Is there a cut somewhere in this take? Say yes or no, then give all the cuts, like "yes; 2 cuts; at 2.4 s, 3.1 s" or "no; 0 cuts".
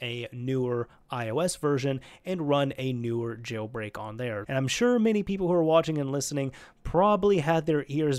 yes; 1 cut; at 4.4 s